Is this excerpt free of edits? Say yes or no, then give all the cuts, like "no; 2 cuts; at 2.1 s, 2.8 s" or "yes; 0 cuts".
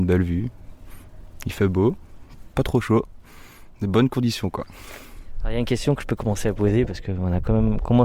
yes; 0 cuts